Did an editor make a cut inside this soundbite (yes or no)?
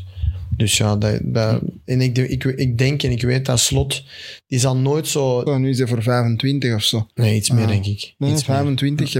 yes